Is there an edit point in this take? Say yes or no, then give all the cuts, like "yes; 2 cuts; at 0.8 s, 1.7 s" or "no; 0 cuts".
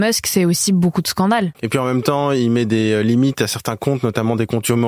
yes; 1 cut; at 1.5 s